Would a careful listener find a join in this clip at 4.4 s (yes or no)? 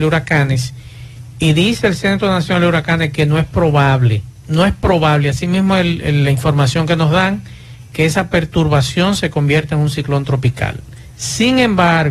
yes